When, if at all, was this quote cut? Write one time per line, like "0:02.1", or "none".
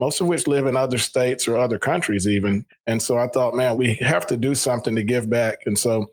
0:02.7
0:03.7

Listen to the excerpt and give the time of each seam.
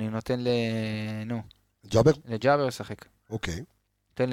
none

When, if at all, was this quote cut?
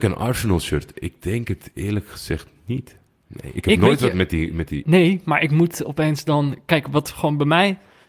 0:04.8

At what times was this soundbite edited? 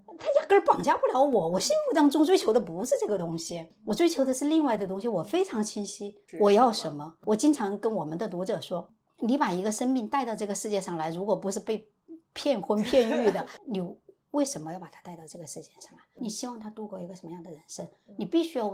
0:06.3
0:09.1
0:13.6

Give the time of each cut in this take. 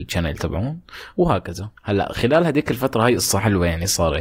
0:01.8

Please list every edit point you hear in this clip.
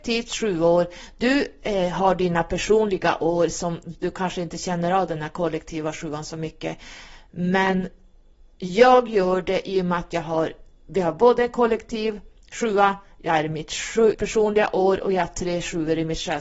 0:10.8
0:14.1

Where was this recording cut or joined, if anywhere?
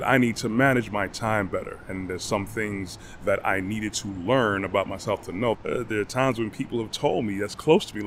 0:05.5

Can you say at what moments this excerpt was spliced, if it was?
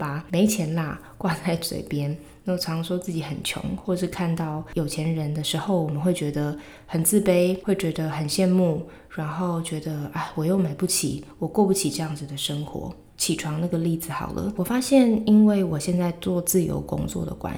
0:13.1
0:14.6

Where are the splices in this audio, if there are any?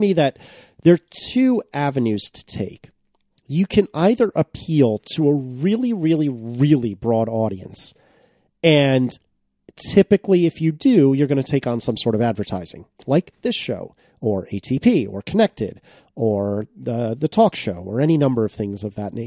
none

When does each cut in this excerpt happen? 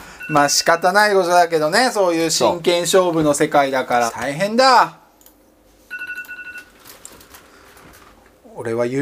0:04.1

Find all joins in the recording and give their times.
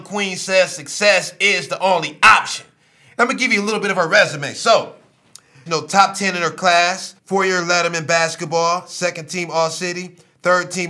0:05.7
0:07.2

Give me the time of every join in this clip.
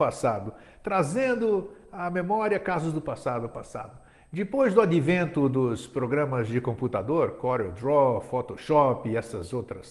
0:03.5

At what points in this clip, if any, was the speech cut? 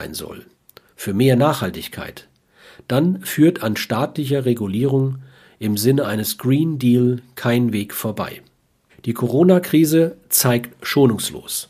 0:08.9

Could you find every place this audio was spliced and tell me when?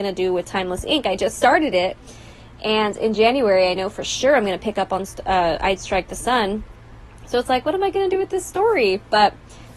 none

